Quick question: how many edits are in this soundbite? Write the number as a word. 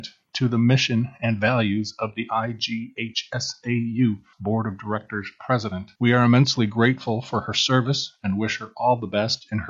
two